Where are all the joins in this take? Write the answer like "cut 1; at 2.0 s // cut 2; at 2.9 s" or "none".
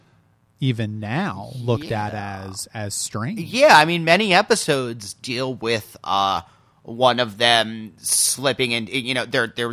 none